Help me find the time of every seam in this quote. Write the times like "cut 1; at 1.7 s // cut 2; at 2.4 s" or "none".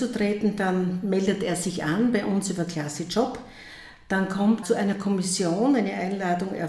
cut 1; at 4.6 s